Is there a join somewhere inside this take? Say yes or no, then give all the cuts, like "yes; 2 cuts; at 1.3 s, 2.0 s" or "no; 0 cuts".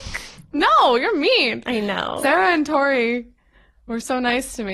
no; 0 cuts